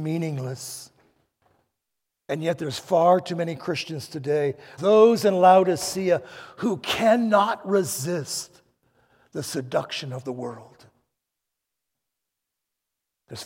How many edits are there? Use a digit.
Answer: 1